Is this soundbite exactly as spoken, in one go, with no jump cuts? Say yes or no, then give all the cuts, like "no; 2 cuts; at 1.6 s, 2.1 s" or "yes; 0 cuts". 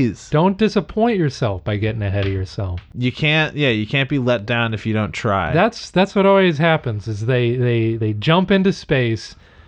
yes; 0 cuts